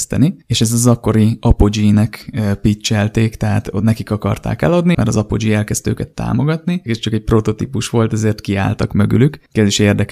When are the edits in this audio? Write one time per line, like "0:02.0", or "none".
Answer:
0:04.9
0:06.9